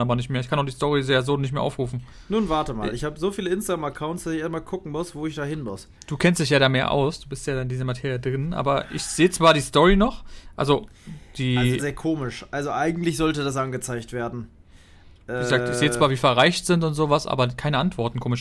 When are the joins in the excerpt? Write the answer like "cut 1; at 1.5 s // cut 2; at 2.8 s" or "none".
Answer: cut 1; at 11.8 s